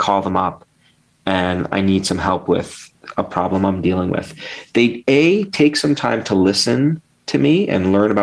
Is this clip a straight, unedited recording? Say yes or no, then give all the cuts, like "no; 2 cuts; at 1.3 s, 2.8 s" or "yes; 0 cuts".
yes; 0 cuts